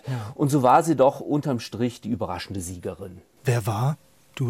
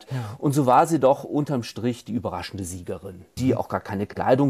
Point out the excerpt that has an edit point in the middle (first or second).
second